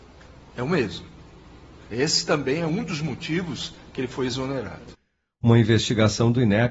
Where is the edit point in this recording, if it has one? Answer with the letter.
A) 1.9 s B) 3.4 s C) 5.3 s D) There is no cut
A